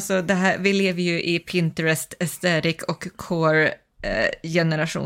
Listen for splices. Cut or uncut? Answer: uncut